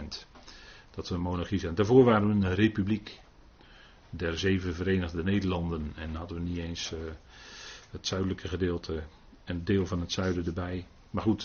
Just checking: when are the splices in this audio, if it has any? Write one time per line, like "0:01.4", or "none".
none